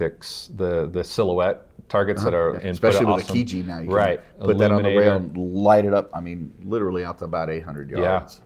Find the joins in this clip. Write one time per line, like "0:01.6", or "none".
0:02.6